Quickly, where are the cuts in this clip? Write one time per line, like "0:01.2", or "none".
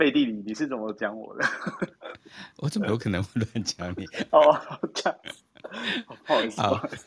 0:04.3